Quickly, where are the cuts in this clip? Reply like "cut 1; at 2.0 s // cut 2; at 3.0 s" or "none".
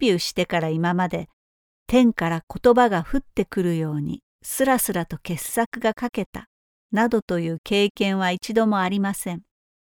none